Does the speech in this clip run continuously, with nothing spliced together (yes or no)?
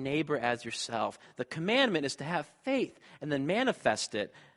yes